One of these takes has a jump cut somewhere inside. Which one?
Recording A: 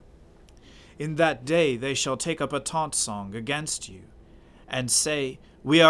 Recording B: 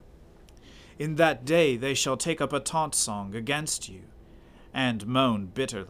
A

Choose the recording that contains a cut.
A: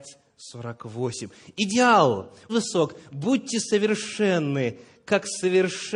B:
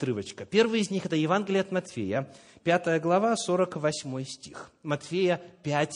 A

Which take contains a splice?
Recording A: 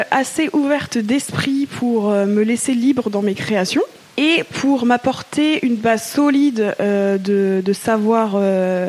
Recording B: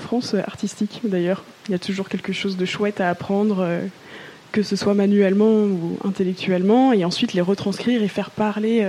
B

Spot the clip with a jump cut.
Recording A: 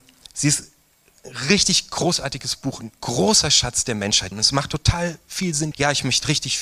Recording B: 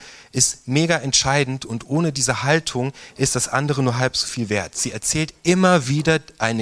A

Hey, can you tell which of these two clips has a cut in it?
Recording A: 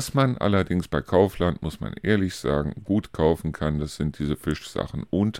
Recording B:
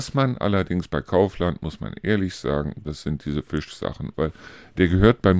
B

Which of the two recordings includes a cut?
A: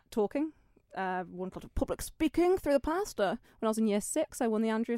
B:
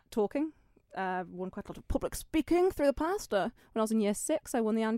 A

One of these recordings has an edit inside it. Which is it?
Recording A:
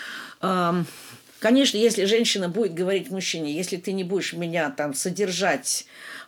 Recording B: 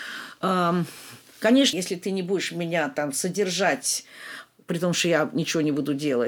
B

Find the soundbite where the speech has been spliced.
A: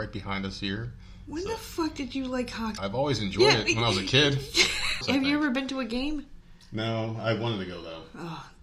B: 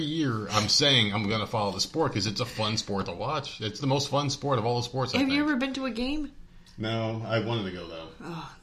A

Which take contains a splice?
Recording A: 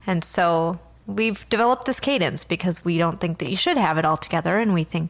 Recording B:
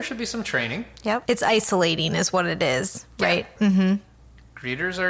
B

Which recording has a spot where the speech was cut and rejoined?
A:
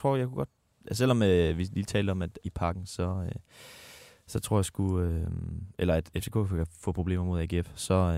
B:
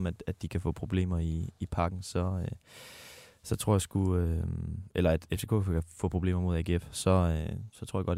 A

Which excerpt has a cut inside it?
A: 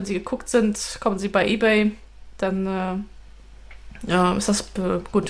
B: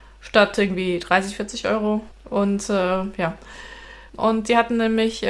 B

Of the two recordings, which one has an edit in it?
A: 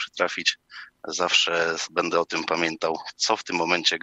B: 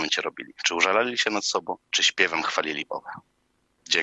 B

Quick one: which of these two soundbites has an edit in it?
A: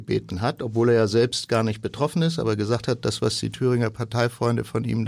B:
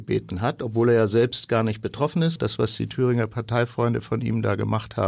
B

